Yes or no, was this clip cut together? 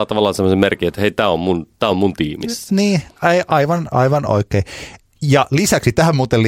no